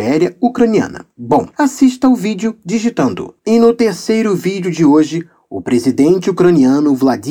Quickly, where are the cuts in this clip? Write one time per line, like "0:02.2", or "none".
0:01.5
0:03.4